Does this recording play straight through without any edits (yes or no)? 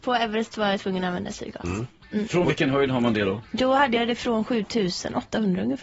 yes